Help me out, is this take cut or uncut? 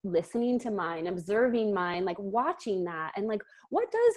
uncut